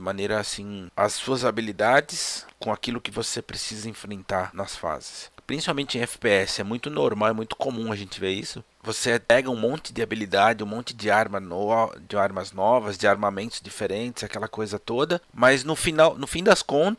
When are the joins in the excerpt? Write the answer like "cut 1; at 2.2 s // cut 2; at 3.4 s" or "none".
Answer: none